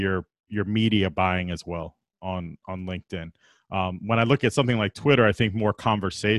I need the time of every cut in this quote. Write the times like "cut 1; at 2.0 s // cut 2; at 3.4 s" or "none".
none